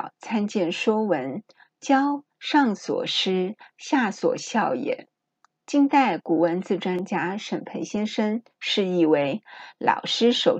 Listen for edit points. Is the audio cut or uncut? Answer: uncut